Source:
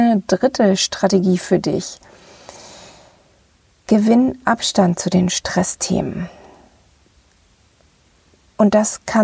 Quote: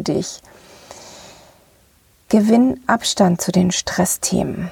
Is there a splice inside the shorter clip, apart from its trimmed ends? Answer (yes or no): no